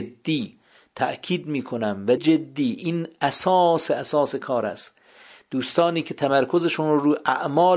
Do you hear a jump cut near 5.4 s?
no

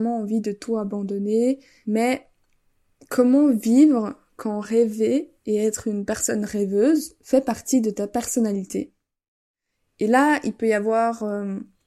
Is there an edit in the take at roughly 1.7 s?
no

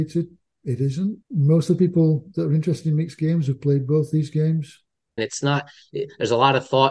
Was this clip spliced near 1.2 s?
yes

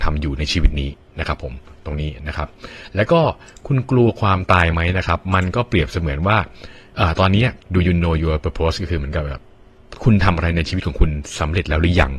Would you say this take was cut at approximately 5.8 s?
no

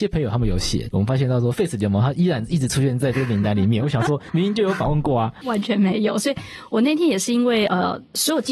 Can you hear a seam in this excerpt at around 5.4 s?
yes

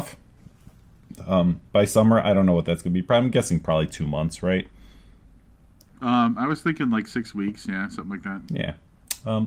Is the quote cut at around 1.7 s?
no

